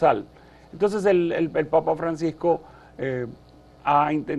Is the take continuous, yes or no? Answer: yes